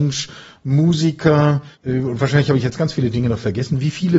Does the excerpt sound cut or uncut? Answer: cut